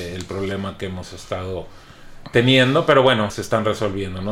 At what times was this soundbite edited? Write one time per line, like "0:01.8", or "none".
0:03.3